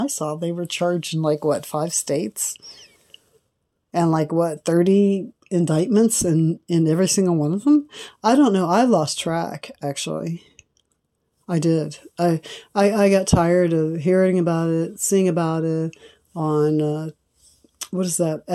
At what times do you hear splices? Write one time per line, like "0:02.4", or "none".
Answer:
none